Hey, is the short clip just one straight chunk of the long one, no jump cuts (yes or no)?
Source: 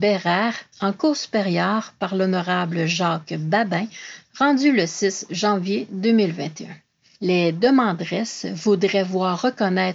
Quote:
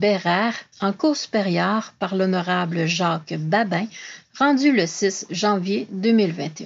yes